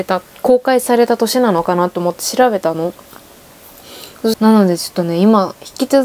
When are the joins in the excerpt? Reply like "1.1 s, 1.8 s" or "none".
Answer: 4.3 s